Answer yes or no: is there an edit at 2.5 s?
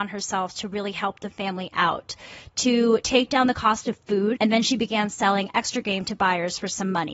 no